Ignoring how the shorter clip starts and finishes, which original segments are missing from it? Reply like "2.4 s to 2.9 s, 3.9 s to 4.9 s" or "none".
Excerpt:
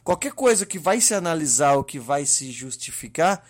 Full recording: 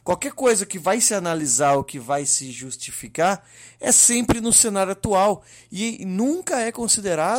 none